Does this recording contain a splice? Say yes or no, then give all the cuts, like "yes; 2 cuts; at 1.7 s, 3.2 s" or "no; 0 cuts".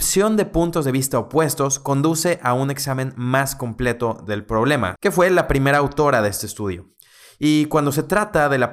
yes; 1 cut; at 5.0 s